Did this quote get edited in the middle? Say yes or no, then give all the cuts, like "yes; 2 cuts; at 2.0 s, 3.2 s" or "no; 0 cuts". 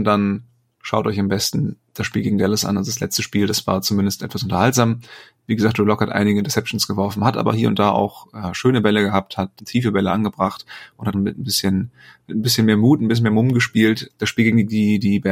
yes; 3 cuts; at 9.6 s, 11.1 s, 14.1 s